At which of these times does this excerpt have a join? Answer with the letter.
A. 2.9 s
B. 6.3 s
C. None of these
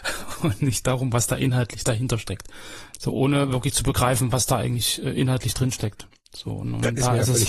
A